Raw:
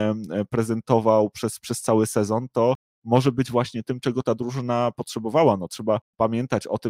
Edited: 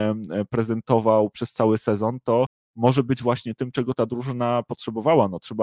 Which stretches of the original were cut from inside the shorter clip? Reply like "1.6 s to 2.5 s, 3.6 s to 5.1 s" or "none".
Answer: 1.3 s to 1.6 s